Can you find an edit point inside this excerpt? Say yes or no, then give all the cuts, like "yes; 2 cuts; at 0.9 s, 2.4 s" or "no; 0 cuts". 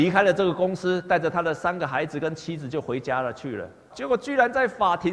yes; 1 cut; at 3.9 s